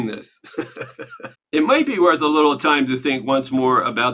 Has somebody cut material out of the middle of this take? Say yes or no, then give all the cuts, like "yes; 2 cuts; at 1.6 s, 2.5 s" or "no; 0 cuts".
yes; 1 cut; at 1.3 s